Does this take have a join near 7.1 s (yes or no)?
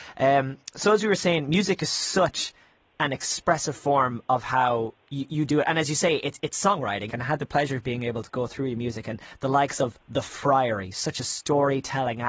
yes